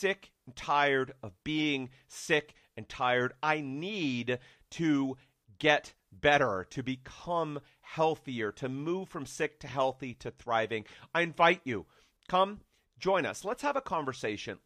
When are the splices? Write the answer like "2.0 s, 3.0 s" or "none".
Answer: none